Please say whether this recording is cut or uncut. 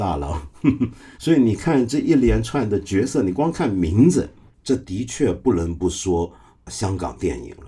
cut